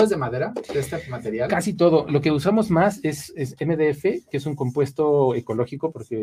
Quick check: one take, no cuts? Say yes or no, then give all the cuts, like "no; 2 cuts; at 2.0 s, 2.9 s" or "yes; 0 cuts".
yes; 0 cuts